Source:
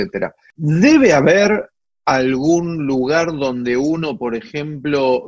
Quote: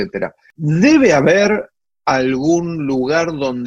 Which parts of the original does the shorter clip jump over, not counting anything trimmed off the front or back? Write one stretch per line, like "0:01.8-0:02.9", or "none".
none